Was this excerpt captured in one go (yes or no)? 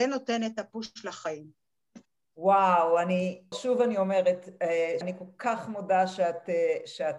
no